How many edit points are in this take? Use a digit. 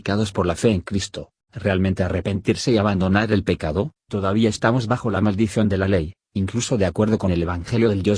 0